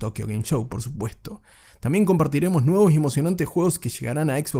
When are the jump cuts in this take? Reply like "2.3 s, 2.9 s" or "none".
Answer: none